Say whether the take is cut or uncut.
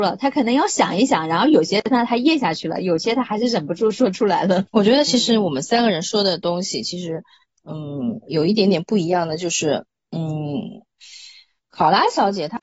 uncut